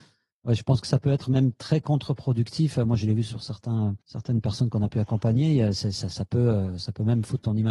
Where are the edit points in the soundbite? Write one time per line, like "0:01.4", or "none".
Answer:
0:04.0

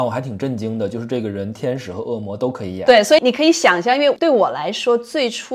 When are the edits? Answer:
0:03.2

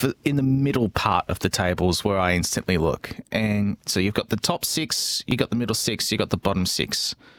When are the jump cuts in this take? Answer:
none

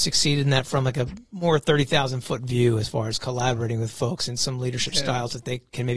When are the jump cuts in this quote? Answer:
none

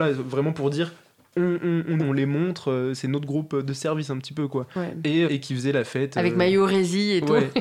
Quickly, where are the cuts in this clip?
0:02.0
0:05.3

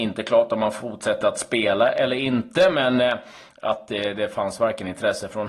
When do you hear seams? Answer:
none

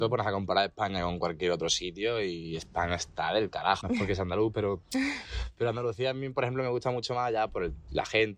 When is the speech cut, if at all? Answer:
0:03.8

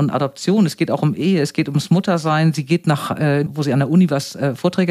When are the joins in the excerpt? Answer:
0:03.5

